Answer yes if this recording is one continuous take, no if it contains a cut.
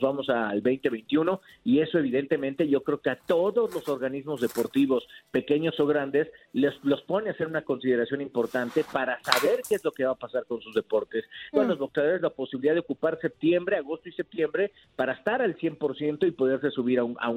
no